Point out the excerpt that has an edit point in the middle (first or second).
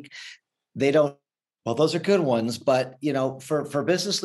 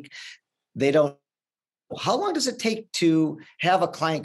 first